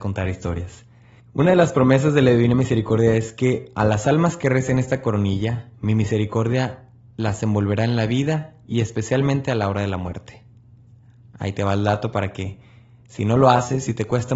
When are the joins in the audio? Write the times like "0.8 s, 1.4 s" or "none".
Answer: none